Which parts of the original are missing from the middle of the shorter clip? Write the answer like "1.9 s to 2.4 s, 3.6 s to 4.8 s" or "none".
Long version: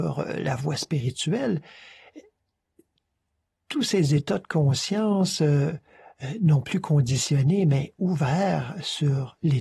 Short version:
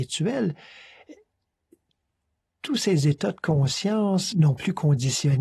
5.4 s to 6.4 s